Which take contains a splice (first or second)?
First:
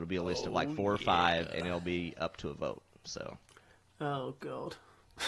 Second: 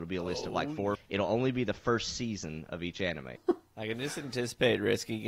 second